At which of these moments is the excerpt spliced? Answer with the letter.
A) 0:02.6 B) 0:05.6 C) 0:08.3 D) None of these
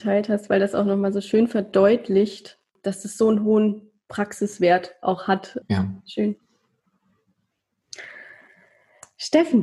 B